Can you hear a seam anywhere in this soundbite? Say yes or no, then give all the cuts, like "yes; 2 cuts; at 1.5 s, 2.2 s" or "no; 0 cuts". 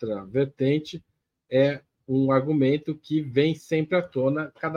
no; 0 cuts